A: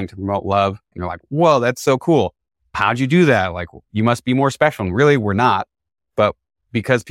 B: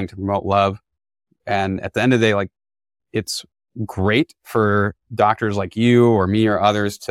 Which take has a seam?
A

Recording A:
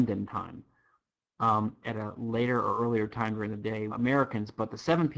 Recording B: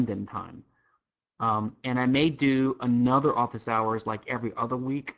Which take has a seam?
A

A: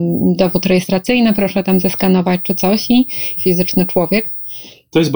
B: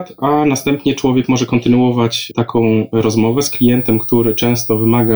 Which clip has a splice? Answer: A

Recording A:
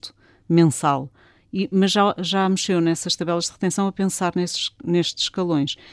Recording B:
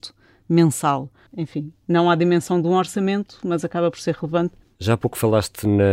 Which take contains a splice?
B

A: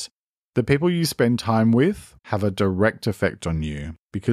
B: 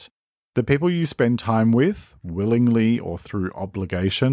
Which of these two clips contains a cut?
A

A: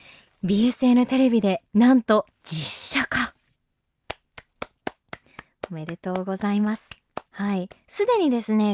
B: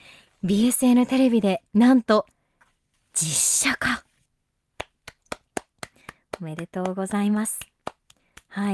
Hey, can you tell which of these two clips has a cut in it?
A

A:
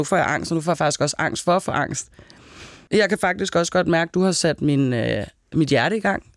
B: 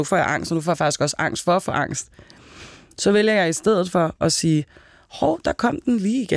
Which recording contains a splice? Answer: A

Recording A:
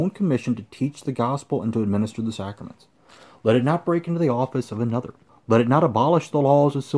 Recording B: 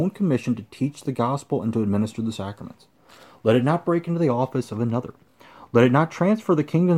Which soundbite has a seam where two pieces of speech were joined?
A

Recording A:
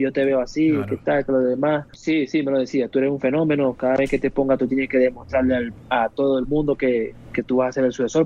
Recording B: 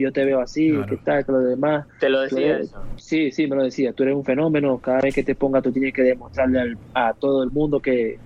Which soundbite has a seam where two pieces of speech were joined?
A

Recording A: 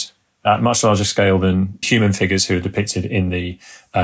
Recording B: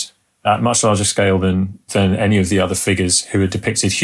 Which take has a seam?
A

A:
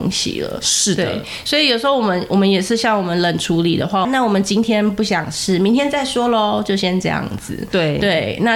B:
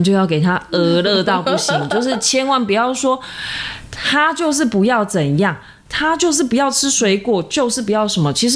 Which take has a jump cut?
A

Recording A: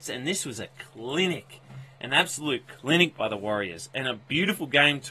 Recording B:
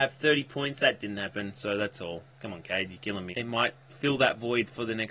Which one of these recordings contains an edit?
B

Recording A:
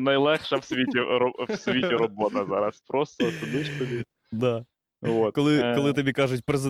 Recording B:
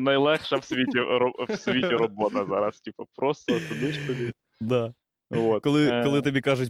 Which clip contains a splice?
A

